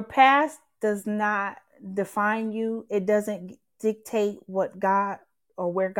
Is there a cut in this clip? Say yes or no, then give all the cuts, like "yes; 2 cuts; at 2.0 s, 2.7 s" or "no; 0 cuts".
no; 0 cuts